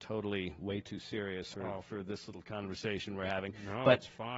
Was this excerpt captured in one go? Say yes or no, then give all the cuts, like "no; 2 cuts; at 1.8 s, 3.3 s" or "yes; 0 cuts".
no; 1 cut; at 1.5 s